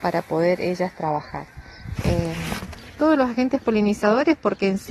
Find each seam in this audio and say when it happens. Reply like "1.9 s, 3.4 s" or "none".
2.0 s